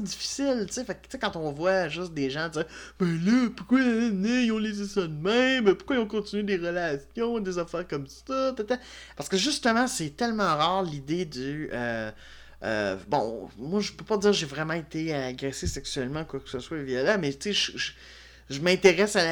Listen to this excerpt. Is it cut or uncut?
cut